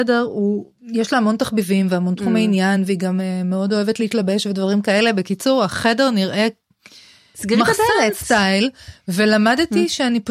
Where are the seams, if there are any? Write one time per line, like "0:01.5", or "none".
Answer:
none